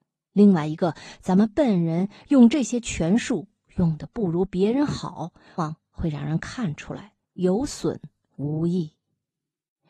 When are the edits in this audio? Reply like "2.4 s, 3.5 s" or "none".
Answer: 5.6 s, 7.2 s